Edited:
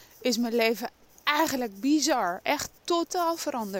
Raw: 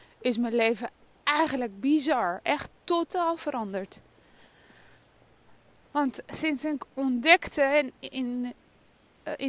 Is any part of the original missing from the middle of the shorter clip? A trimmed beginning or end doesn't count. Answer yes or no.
no